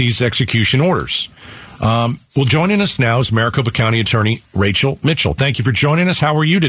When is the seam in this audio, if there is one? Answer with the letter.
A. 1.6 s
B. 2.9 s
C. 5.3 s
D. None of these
D